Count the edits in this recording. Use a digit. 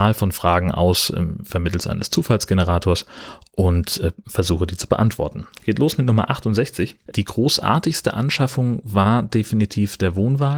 1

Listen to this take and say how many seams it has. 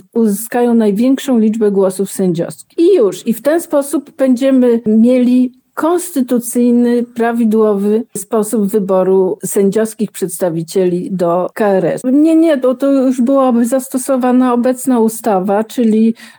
1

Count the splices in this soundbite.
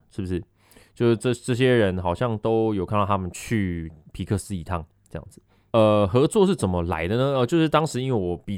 1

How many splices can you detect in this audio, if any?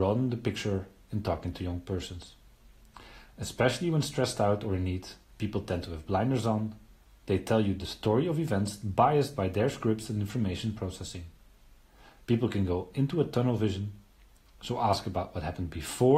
0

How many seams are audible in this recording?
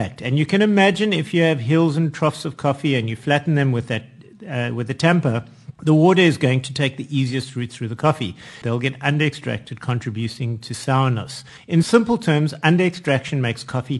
3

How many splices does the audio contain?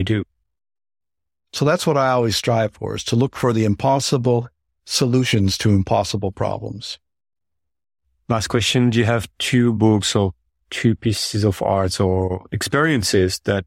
1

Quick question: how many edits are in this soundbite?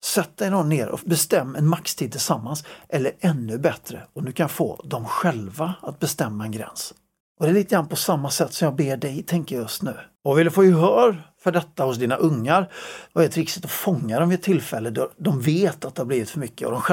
2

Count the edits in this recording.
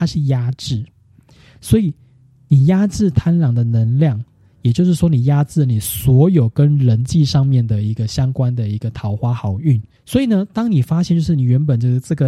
1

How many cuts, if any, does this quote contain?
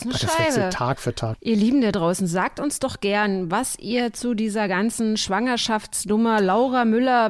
1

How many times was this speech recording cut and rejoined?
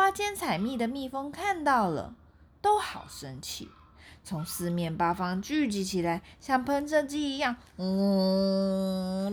0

